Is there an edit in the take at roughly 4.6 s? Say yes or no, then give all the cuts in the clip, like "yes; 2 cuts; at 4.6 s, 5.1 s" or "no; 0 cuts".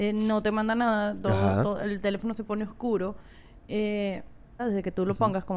yes; 1 cut; at 4.6 s